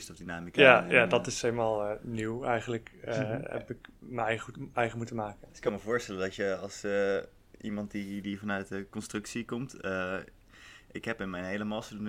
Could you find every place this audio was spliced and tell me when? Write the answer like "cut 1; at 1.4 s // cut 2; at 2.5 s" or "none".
cut 1; at 5.5 s